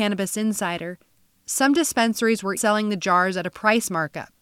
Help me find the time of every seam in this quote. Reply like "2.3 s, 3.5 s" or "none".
2.6 s